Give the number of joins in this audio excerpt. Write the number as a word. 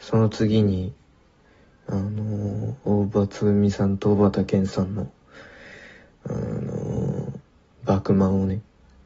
zero